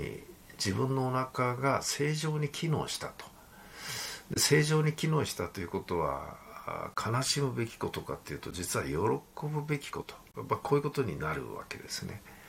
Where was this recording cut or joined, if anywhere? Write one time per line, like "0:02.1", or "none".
0:10.0